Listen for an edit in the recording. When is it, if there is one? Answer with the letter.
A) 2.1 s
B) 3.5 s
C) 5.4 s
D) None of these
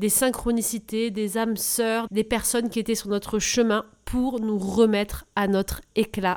A